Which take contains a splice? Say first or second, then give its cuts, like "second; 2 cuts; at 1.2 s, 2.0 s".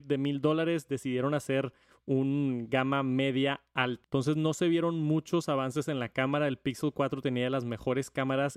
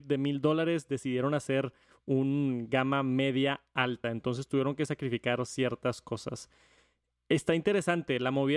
first; 1 cut; at 4.0 s